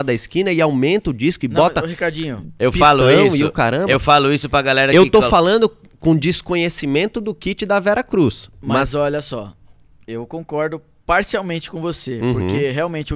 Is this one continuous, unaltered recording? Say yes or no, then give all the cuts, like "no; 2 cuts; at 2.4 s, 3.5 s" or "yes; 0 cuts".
yes; 0 cuts